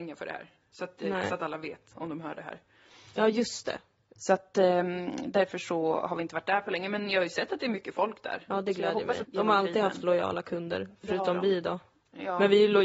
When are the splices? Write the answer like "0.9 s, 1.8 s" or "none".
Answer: 1.9 s, 4.2 s, 9.2 s

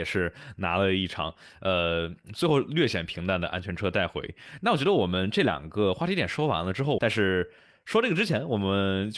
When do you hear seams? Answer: 7.0 s

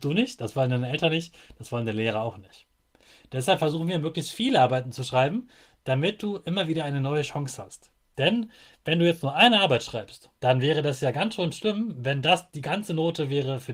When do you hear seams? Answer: 8.1 s, 10.4 s

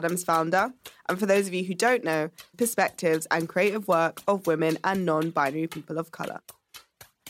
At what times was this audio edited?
2.5 s

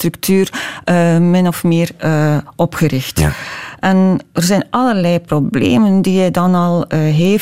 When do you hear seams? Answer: none

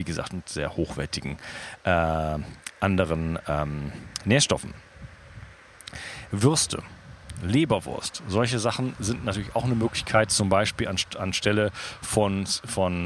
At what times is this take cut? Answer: none

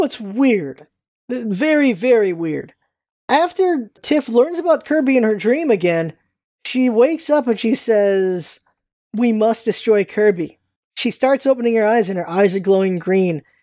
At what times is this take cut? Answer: none

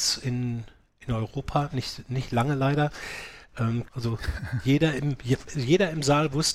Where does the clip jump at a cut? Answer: 3.9 s

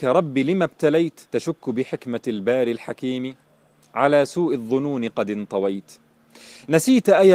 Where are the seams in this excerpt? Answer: 1.2 s

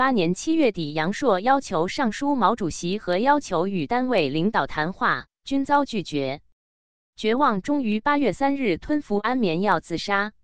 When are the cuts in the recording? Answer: none

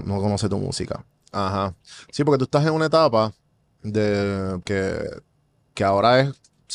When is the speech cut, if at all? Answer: 1.3 s, 4.6 s

